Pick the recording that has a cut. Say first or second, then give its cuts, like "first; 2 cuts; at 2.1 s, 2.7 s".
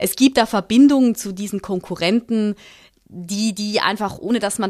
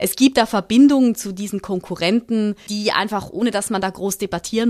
second; 1 cut; at 2.7 s